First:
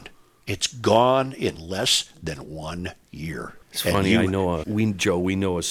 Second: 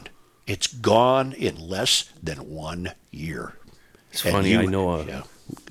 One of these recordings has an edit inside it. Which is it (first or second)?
first